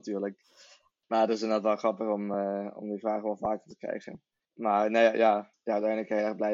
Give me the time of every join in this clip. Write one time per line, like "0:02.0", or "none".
none